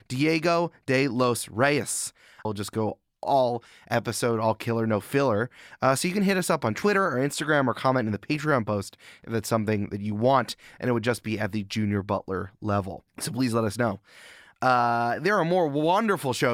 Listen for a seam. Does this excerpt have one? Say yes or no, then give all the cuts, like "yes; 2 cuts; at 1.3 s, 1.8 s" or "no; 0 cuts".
yes; 1 cut; at 2.4 s